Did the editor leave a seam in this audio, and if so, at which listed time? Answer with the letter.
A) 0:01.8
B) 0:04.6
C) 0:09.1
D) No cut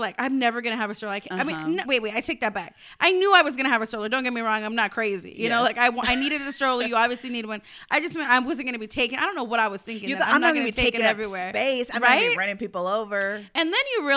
A